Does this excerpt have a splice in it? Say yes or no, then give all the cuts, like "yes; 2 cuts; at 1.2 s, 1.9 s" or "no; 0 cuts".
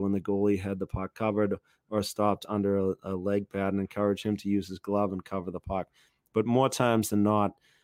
no; 0 cuts